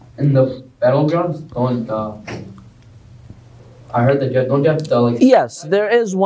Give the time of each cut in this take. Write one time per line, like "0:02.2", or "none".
0:01.9